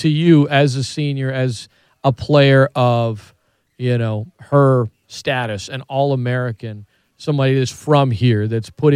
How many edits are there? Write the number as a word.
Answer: zero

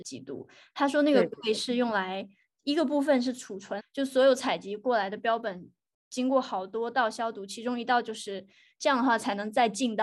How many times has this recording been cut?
two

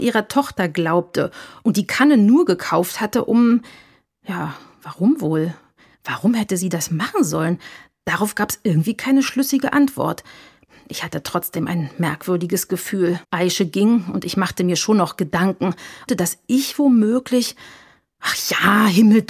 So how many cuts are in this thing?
two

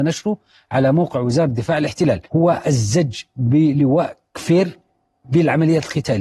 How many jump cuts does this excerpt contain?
one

